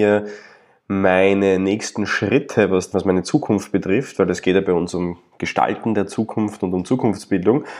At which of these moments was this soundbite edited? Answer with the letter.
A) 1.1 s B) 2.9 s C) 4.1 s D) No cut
B